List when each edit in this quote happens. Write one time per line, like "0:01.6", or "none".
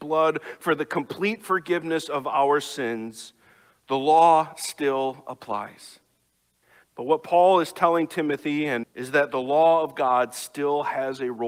0:06.8
0:08.8